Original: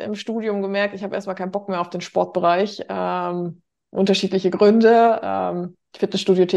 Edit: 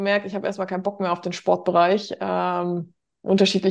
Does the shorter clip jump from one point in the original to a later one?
no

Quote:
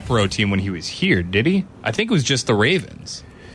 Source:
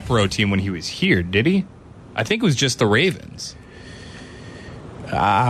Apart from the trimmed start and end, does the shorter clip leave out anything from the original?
yes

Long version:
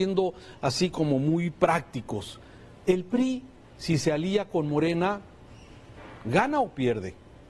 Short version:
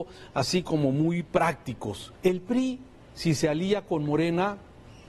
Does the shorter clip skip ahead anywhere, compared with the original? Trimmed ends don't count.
yes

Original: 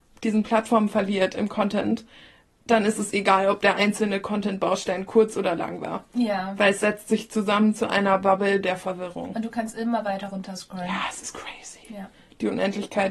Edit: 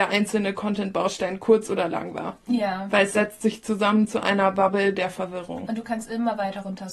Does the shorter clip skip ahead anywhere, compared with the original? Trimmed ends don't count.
no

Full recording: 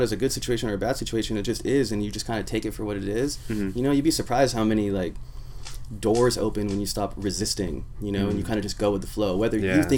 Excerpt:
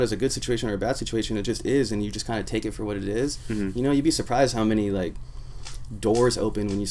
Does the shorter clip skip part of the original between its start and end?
no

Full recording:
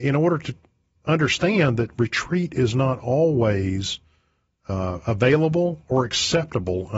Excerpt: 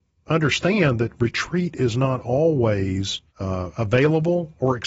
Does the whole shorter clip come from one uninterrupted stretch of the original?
no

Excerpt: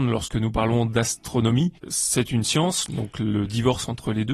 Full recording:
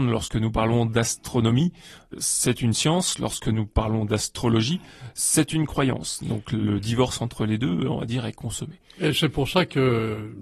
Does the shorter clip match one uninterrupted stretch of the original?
no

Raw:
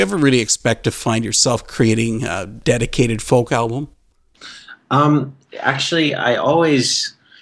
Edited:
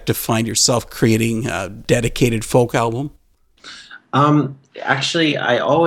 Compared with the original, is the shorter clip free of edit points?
yes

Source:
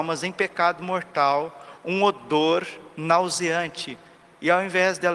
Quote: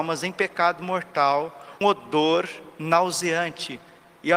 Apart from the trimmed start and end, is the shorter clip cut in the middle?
yes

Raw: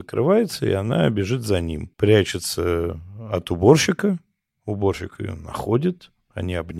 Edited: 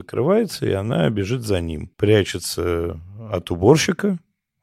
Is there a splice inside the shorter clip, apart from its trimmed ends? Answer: no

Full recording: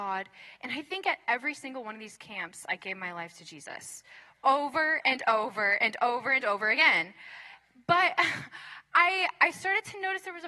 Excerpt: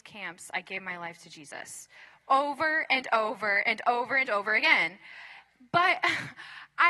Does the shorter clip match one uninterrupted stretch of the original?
yes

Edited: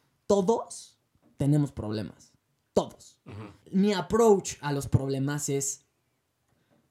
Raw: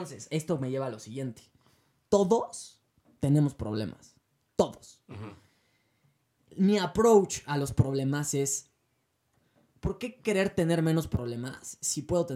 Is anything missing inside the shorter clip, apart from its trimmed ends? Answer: yes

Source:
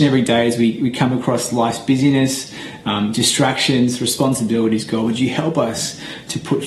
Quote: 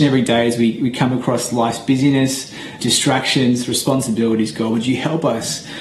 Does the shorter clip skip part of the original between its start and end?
yes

